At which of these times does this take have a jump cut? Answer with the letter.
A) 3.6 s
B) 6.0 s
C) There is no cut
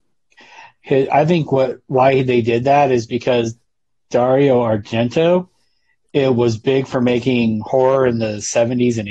C